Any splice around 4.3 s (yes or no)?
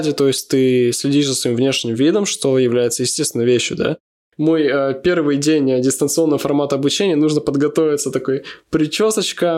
yes